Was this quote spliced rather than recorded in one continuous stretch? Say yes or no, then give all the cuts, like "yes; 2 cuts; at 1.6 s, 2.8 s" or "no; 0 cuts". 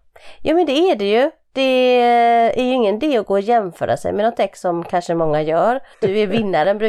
yes; 1 cut; at 5.9 s